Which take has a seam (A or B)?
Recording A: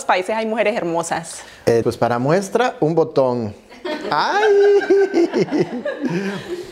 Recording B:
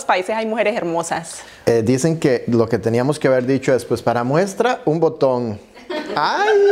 A